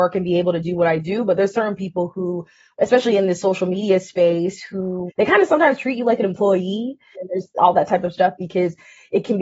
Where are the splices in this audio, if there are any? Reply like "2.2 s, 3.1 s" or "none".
5.1 s, 7.1 s